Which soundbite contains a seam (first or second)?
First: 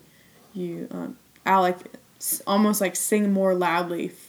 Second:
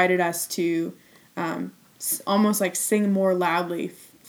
first